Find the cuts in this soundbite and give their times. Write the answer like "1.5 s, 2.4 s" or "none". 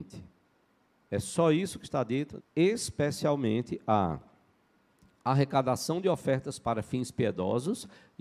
2.4 s